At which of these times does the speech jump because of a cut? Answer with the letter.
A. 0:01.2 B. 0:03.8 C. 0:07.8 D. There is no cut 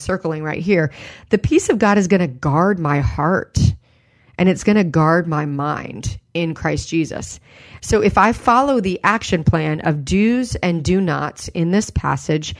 C